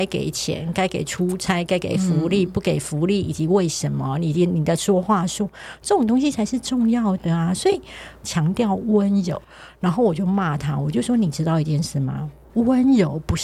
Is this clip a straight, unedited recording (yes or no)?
no